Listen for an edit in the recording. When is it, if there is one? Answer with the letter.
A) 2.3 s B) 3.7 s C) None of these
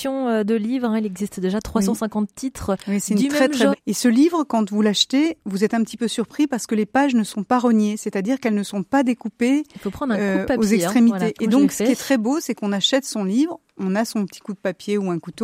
B